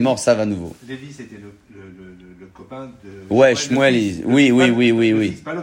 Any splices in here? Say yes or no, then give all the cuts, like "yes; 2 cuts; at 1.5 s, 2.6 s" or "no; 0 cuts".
no; 0 cuts